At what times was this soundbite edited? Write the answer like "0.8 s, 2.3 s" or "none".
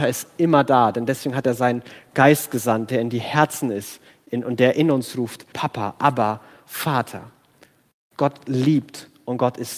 5.5 s